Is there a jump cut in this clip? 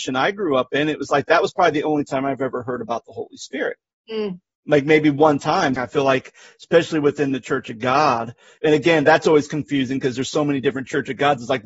yes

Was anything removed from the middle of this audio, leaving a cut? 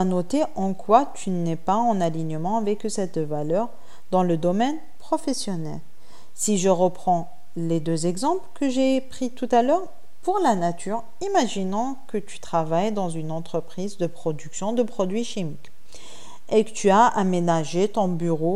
no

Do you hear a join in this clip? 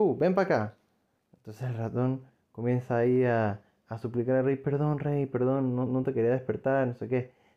no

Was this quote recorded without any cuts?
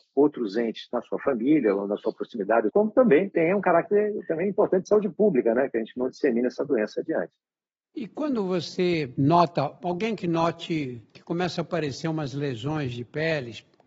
no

